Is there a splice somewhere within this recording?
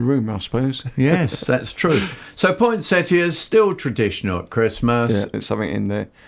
yes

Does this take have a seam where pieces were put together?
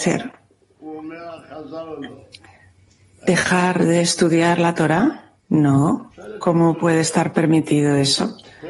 yes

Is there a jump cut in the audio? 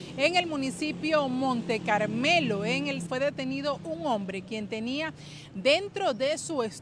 yes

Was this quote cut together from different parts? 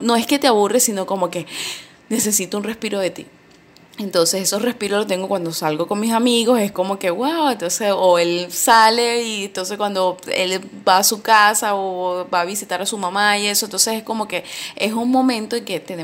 no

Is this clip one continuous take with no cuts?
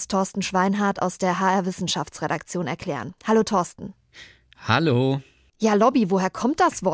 yes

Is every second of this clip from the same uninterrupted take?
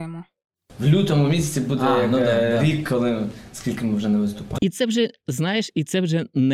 no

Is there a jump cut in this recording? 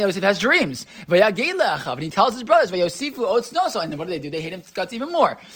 no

